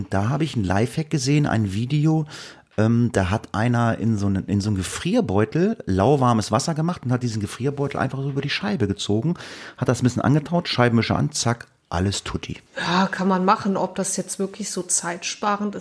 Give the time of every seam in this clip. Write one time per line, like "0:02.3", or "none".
0:12.7